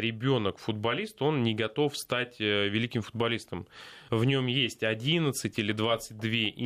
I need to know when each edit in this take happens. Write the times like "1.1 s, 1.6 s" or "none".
4.1 s